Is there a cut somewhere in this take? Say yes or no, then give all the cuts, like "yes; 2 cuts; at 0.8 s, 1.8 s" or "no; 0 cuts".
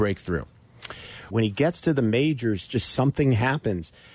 yes; 1 cut; at 1.3 s